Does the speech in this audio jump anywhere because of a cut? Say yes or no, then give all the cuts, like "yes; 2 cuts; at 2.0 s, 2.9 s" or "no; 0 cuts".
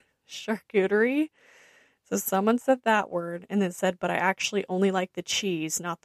no; 0 cuts